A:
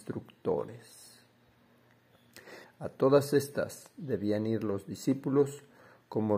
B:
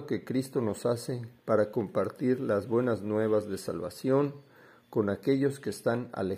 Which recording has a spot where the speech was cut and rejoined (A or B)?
A